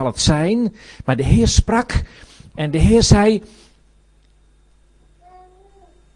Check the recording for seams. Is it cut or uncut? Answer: uncut